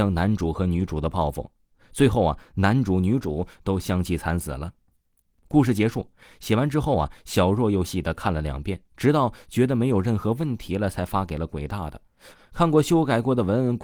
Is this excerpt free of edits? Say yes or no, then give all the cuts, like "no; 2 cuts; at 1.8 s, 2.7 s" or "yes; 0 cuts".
no; 2 cuts; at 7.8 s, 12.3 s